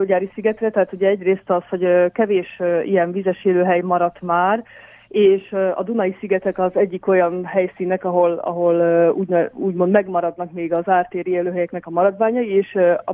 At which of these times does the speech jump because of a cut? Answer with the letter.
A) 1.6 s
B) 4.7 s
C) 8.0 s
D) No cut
D